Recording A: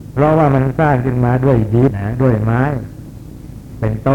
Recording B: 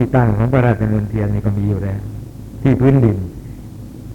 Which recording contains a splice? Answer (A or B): A